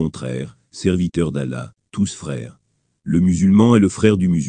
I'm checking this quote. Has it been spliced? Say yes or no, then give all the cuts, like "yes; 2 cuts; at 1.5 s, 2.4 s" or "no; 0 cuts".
no; 0 cuts